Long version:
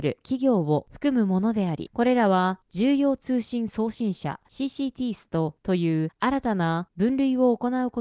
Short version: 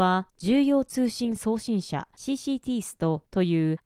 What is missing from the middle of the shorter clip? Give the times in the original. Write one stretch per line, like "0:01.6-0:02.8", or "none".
none